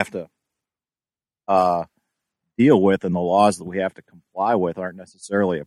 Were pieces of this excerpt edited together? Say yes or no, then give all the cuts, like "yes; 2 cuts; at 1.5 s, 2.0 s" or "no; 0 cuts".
no; 0 cuts